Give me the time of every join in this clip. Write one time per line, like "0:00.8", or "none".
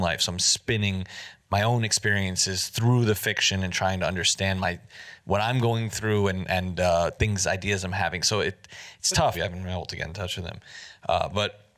0:09.3

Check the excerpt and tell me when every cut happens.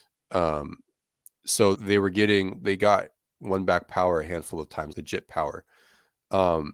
0:01.7
0:04.9

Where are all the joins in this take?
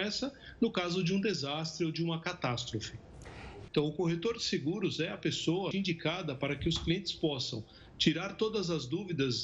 0:03.7
0:05.7

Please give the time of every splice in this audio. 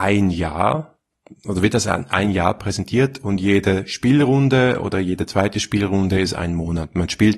none

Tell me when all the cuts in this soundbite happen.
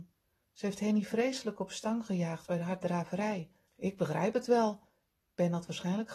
0:03.7

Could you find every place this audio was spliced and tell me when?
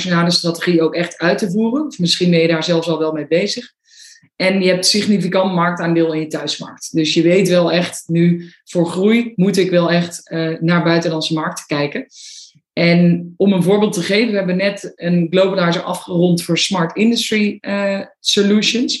none

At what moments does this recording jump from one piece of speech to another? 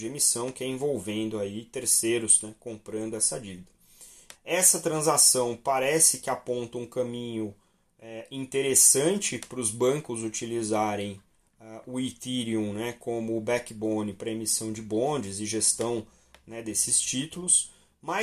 0:04.3

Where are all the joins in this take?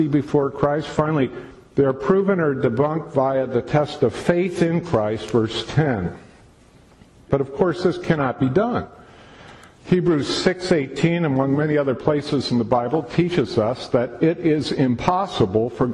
0:07.3

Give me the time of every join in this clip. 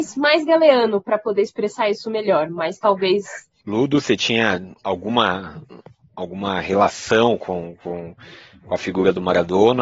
0:03.6

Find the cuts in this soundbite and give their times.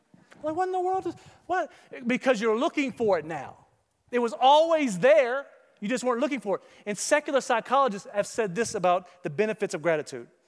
none

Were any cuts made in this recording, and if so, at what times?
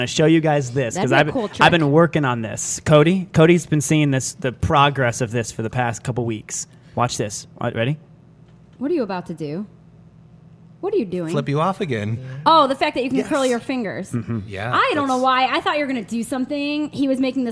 none

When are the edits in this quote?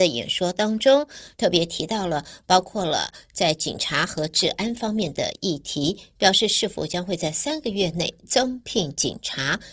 0:01.4

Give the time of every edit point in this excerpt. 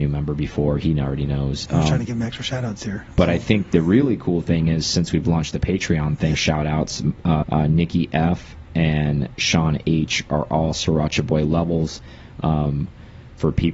0:06.3
0:07.4

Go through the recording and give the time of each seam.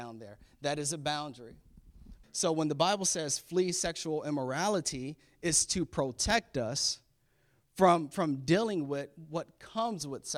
0:02.2

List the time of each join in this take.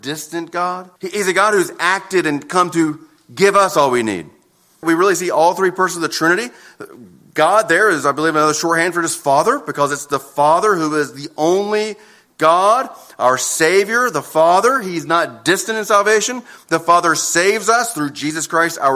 0:01.0
0:04.8

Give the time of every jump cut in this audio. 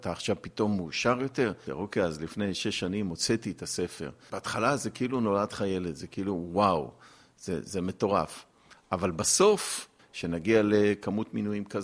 0:01.7
0:10.0

